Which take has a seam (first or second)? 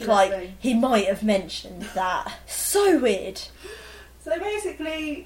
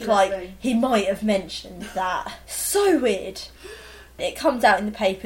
second